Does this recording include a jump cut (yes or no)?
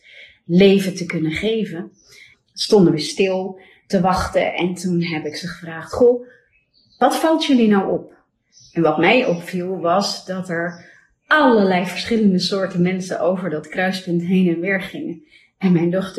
yes